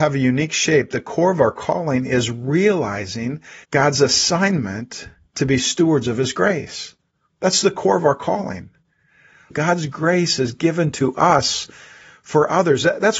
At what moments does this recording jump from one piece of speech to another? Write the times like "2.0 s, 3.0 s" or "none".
3.6 s, 9.5 s